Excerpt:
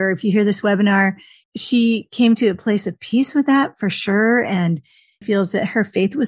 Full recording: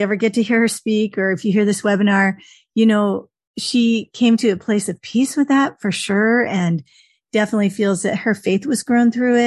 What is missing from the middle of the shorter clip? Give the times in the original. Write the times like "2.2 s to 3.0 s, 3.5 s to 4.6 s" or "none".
2.6 s to 3.5 s, 7.2 s to 7.7 s